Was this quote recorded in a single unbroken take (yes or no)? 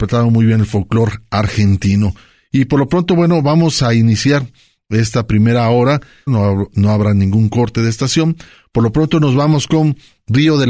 no